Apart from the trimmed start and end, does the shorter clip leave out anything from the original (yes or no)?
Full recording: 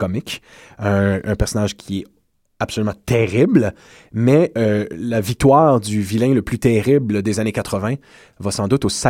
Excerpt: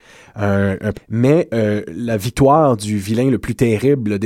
yes